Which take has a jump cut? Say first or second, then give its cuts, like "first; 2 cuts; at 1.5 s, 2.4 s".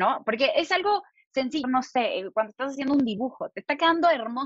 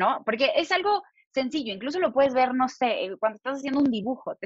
first; 1 cut; at 1.6 s